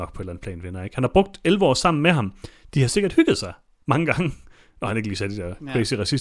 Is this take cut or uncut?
uncut